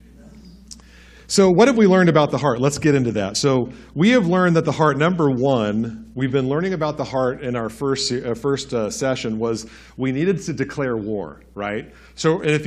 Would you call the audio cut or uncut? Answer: uncut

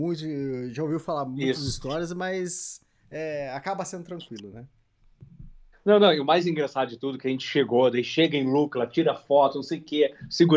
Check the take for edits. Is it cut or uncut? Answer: uncut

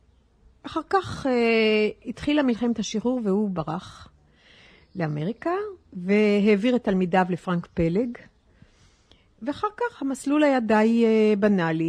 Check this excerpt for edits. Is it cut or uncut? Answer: uncut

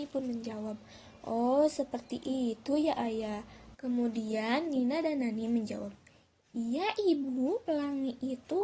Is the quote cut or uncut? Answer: cut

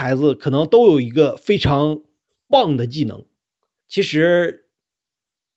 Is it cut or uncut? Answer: cut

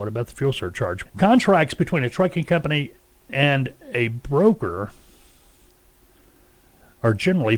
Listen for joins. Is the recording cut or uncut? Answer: cut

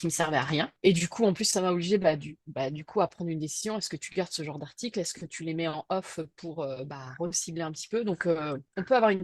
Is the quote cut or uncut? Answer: uncut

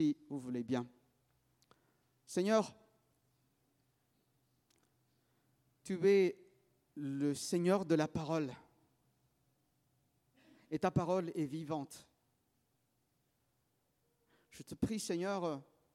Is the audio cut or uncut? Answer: uncut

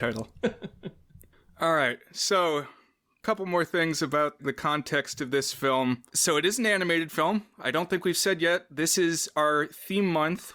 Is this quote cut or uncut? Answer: cut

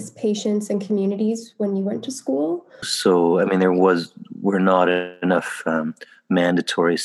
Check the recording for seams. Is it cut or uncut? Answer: cut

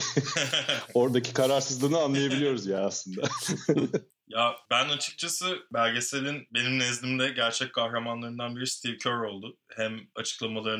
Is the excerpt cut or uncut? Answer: uncut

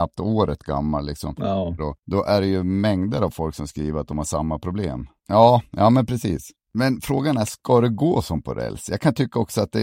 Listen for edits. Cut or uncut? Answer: cut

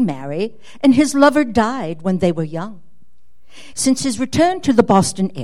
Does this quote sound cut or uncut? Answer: cut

